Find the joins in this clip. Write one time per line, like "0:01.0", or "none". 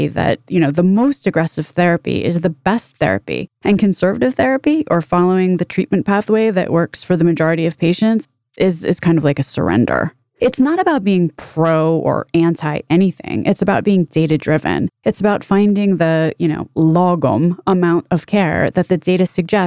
none

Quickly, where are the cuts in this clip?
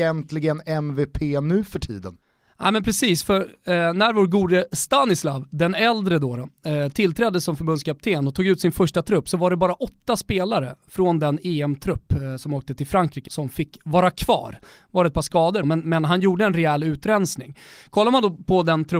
0:13.3
0:15.6

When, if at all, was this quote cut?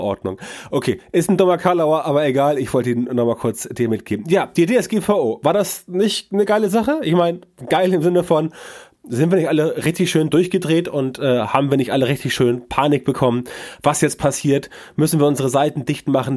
none

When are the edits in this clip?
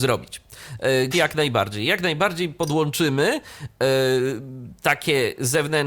0:01.1

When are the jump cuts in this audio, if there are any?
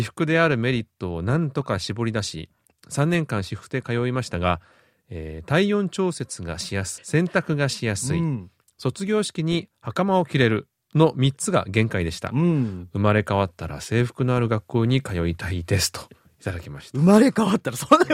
0:07.0

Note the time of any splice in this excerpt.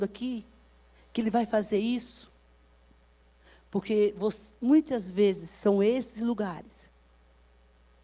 none

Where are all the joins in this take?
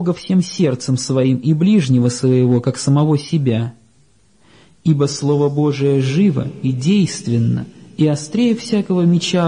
none

